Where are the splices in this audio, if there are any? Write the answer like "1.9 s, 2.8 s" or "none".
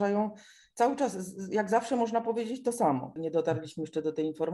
3.2 s